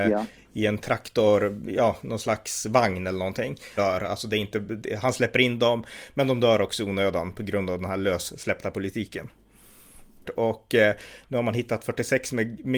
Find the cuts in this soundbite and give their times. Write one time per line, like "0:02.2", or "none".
0:03.8
0:10.2